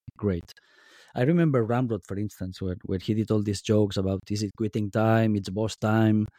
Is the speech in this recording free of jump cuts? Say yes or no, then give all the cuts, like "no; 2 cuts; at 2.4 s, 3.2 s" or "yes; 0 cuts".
yes; 0 cuts